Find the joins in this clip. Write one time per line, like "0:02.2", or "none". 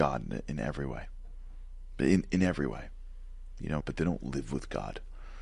0:03.8